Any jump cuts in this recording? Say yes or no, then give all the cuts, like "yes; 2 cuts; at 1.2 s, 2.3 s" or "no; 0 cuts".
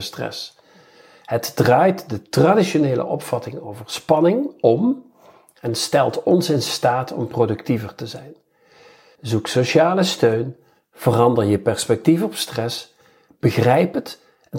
yes; 1 cut; at 9.1 s